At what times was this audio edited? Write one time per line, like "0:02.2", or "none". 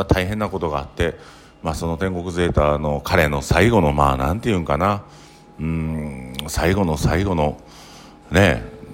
none

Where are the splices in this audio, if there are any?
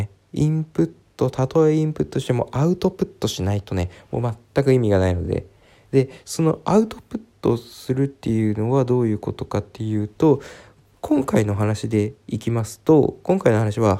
none

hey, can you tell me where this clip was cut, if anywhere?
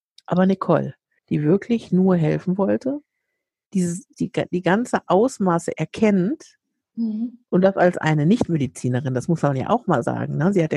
0:01.2
0:04.1

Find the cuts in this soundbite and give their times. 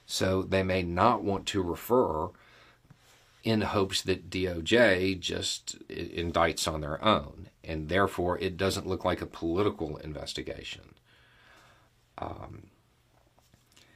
none

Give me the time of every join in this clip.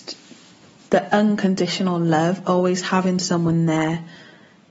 none

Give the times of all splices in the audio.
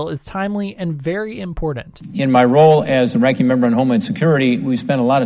none

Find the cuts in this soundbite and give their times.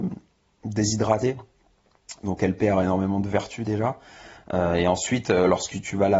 none

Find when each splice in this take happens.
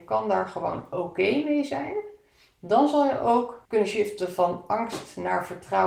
0:03.7

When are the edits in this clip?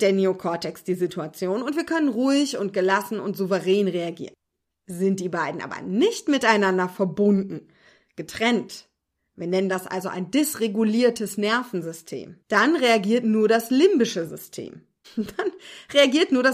0:12.4
0:15.0

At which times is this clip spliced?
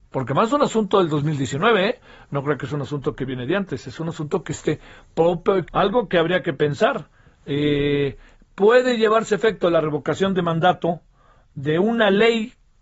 0:05.6

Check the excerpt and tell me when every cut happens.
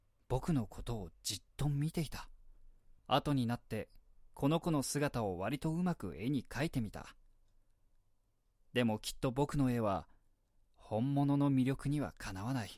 0:03.0

